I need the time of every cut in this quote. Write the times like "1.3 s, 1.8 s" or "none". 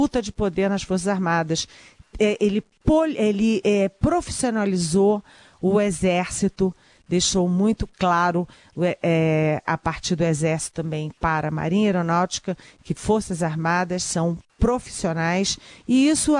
none